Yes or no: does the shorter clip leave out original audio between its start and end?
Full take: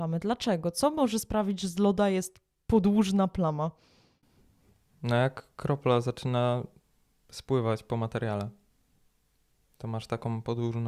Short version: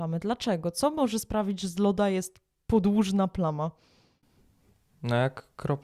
no